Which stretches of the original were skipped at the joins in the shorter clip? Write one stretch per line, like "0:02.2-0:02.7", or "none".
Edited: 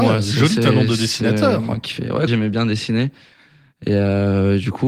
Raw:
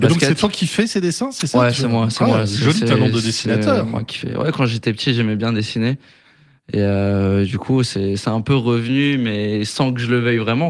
0:04.5-0:05.1